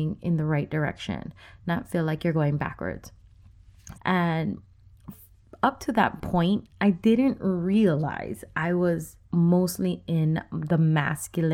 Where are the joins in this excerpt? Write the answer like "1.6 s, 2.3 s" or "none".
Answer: 3.9 s, 9.2 s